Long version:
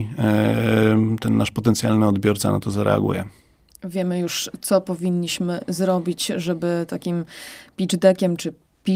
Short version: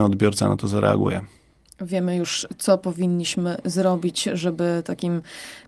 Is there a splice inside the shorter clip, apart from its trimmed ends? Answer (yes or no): no